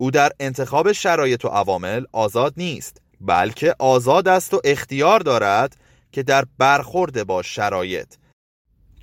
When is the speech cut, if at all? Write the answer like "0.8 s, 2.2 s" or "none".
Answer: 3.1 s